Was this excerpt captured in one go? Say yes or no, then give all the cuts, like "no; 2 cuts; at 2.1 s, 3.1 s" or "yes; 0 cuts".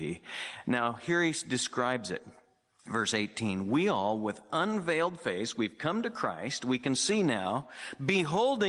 yes; 0 cuts